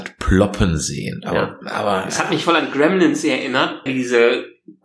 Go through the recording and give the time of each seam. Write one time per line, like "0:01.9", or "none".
0:01.6
0:03.9